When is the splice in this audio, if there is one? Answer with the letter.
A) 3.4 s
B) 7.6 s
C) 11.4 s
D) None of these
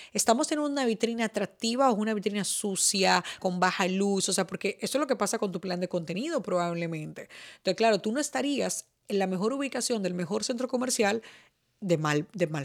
A